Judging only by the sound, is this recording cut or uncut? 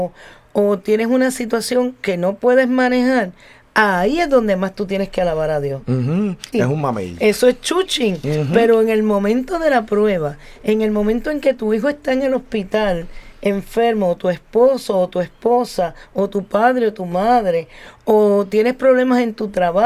cut